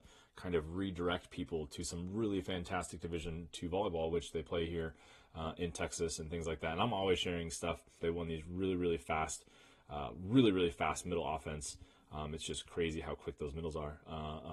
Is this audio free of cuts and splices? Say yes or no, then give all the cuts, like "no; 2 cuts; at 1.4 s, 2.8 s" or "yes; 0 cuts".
no; 1 cut; at 8.0 s